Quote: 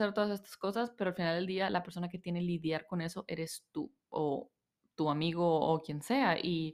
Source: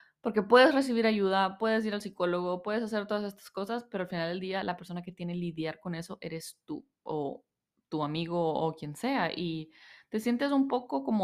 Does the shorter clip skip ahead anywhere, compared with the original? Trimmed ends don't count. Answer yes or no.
no